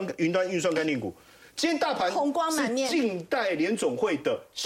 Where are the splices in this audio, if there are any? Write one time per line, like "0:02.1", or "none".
none